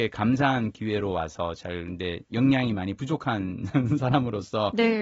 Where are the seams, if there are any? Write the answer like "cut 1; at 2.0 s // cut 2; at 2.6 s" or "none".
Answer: none